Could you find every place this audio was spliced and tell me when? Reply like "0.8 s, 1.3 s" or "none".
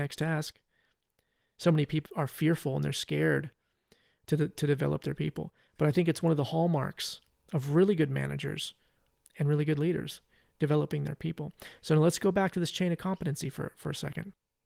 2.1 s